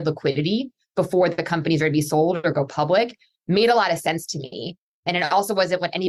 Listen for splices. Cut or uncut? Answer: uncut